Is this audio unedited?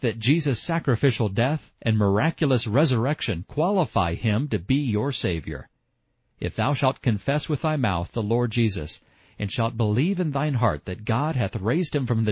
yes; 0 cuts

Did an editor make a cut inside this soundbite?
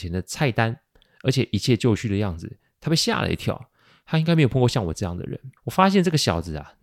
yes; 1 cut; at 5.6 s

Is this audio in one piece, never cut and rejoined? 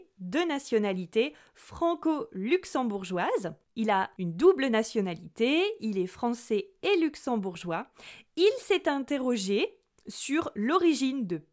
no; 1 cut; at 8.3 s

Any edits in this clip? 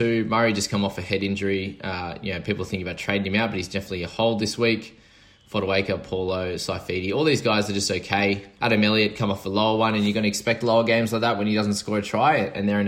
yes; 1 cut; at 8.6 s

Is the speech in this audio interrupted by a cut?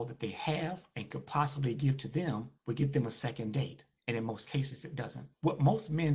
no; 0 cuts

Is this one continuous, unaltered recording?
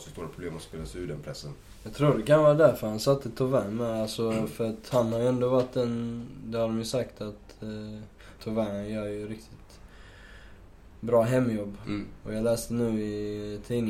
no; 2 cuts; at 8.4 s, 11.8 s

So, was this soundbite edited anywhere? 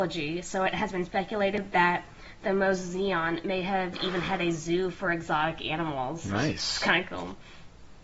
no; 0 cuts

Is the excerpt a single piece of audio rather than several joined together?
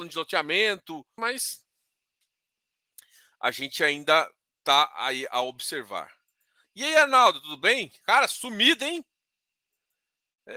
no; 1 cut; at 1.2 s

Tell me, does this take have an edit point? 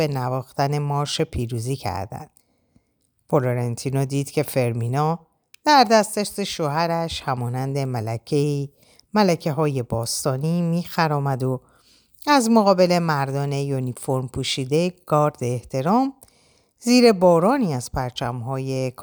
no; 0 cuts

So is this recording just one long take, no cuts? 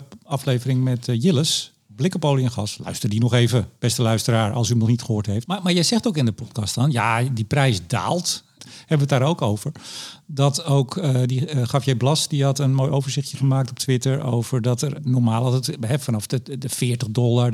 no; 2 cuts; at 5.5 s, 8.6 s

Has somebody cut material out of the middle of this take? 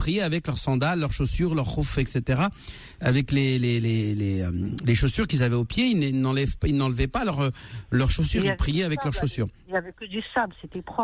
no; 0 cuts

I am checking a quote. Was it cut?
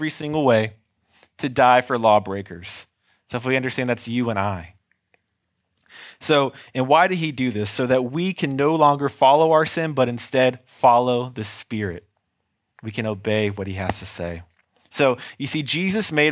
no; 0 cuts

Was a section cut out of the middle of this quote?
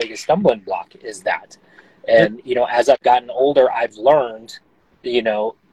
no; 0 cuts

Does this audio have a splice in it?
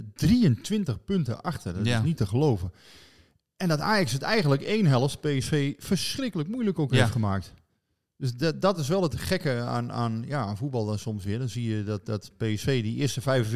no; 0 cuts

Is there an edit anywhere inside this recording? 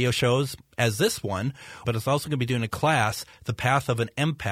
yes; 1 cut; at 1.8 s

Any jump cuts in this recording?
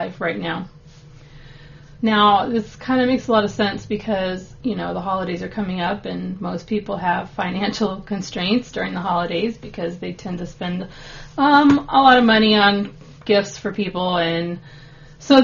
yes; 1 cut; at 1.9 s

